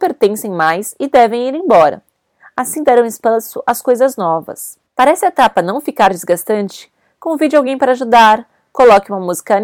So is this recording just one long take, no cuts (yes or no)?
no